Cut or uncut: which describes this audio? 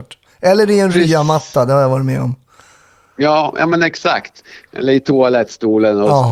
uncut